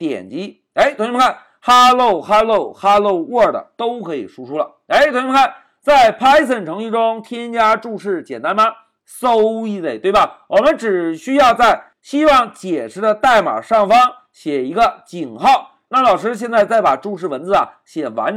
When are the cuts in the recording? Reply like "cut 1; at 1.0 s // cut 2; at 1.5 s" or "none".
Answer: cut 1; at 15.9 s